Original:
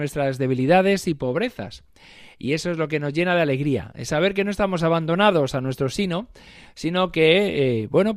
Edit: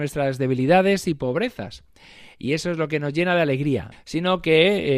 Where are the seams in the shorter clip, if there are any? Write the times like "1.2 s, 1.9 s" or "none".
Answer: 3.9 s